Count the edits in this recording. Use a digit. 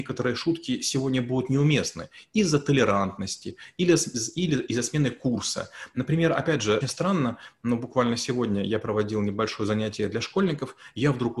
1